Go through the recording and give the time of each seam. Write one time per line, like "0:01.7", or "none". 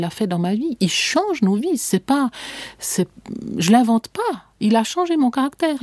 none